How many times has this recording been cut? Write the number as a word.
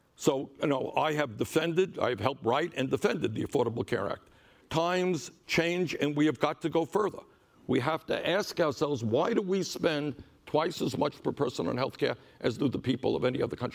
one